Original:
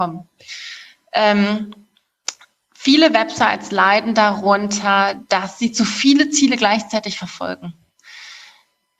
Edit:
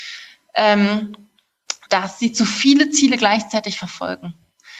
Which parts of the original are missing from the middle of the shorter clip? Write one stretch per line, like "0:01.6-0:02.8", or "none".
0:02.4-0:05.3